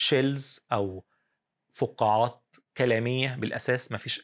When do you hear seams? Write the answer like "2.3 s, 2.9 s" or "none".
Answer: 2.7 s